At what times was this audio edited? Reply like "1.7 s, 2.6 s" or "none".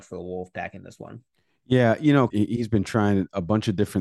2.3 s